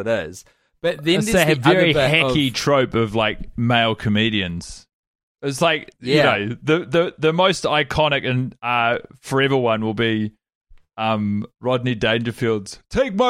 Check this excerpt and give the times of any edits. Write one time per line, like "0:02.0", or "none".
0:03.5